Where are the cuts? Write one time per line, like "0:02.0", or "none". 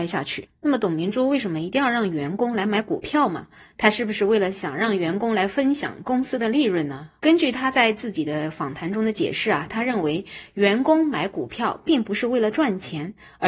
0:07.2